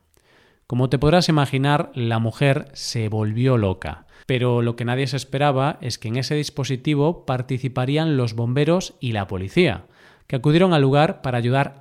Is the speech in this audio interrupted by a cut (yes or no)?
yes